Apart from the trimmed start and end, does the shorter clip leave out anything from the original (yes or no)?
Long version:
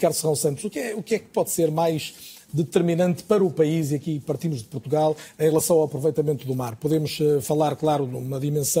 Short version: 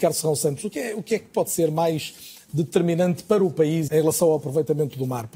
yes